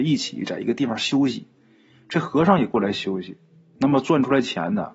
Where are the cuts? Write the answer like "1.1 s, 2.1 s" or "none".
3.8 s